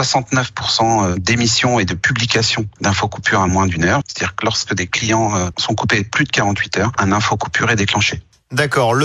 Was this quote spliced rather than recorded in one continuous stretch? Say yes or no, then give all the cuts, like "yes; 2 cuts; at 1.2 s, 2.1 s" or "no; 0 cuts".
yes; 3 cuts; at 4.0 s, 5.5 s, 7.0 s